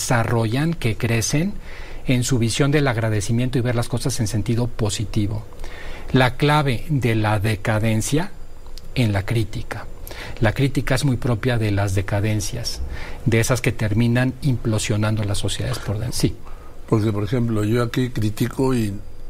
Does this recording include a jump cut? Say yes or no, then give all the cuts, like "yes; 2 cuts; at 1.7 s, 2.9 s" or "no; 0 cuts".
yes; 1 cut; at 16.1 s